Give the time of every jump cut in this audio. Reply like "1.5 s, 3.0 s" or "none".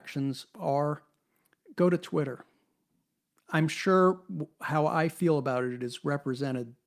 none